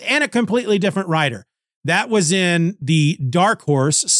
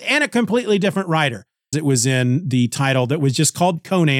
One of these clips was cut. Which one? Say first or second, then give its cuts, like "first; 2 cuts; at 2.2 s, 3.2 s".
second; 1 cut; at 1.7 s